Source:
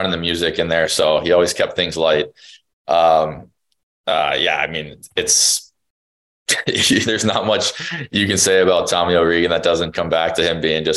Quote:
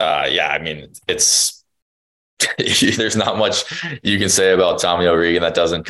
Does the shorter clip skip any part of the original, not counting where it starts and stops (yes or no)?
no